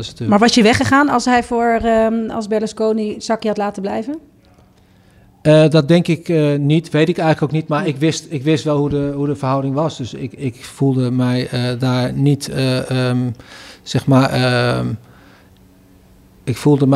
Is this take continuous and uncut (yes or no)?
yes